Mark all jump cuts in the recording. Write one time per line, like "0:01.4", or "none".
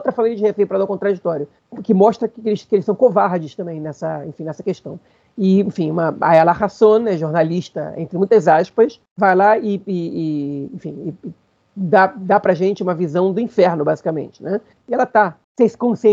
0:14.8